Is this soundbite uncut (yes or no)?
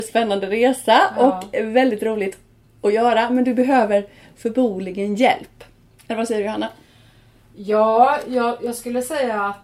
yes